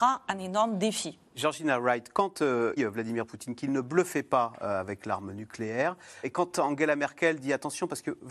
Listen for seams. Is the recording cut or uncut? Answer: cut